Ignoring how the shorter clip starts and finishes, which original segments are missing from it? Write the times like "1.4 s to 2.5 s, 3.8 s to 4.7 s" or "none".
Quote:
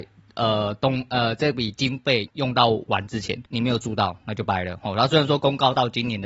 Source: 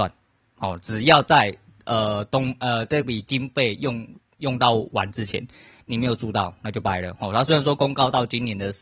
3.8 s to 4.3 s, 5.5 s to 5.8 s